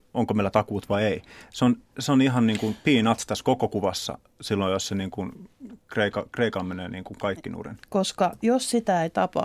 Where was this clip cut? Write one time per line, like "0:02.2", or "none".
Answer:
0:07.8